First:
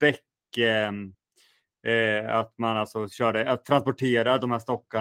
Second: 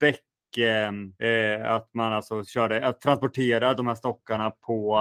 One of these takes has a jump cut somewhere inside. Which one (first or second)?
second